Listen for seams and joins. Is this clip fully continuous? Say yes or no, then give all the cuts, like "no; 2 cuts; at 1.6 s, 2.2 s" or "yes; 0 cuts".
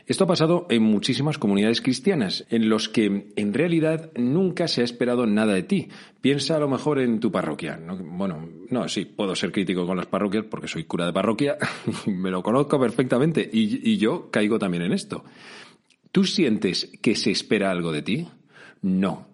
no; 1 cut; at 2.4 s